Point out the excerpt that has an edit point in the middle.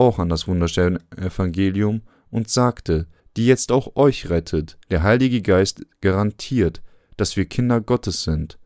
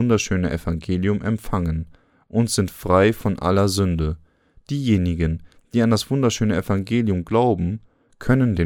first; 2 cuts; at 3.2 s, 4.9 s

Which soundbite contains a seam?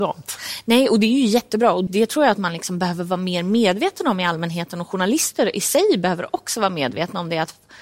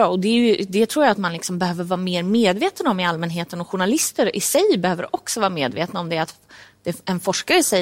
first; 1 cut; at 1.9 s

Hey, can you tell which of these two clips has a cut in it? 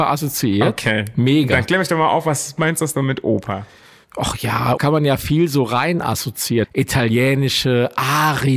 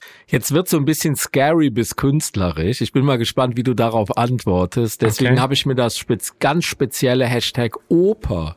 first; 2 cuts; at 4.8 s, 6.6 s

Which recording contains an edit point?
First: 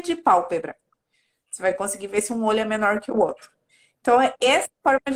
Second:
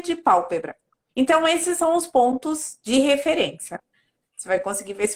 second; 2 cuts; at 1.1 s, 4.2 s

